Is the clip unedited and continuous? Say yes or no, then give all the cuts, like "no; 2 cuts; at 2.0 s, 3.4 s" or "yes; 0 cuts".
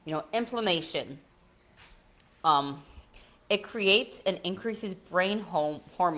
yes; 0 cuts